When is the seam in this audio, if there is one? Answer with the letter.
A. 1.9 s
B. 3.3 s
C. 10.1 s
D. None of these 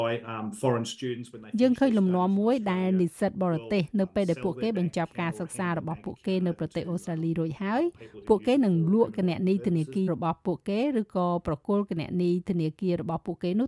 C